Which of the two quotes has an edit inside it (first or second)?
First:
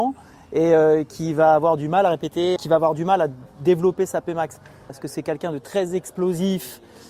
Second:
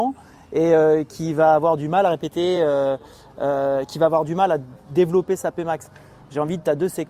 first